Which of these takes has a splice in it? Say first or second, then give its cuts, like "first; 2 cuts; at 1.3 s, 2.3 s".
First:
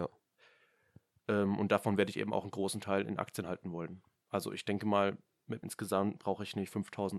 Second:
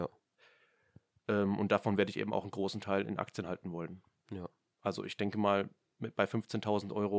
first; 2 cuts; at 4.2 s, 5.6 s